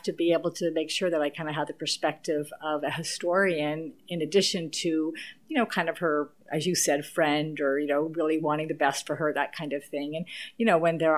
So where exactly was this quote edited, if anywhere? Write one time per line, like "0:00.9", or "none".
none